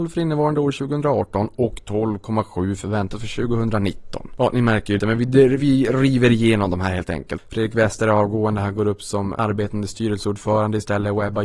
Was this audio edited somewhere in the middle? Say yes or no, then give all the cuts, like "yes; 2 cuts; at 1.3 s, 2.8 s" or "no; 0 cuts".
yes; 2 cuts; at 5.0 s, 7.4 s